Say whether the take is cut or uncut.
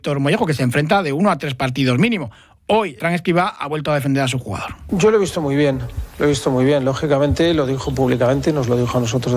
cut